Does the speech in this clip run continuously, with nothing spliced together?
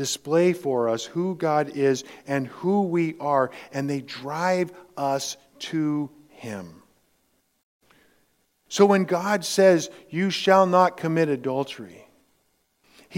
yes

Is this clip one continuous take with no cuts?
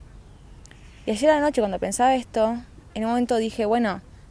yes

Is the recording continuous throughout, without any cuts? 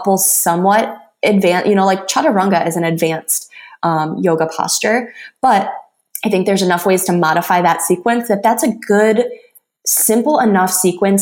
yes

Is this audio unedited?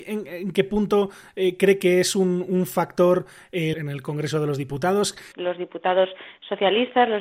no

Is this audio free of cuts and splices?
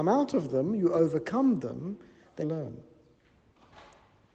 no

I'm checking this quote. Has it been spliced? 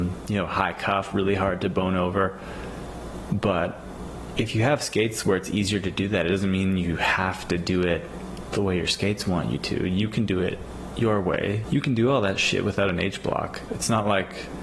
yes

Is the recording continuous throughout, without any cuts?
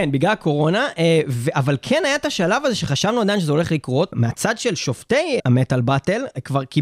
yes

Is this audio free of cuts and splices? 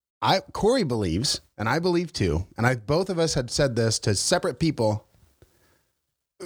yes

